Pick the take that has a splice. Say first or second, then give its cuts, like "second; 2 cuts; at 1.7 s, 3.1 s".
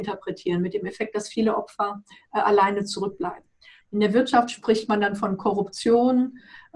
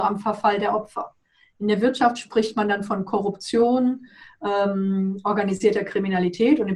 first; 1 cut; at 3.8 s